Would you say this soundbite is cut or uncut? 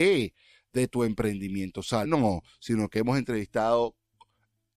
cut